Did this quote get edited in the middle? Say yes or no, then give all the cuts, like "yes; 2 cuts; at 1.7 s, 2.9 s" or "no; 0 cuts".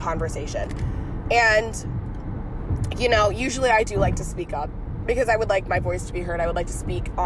no; 0 cuts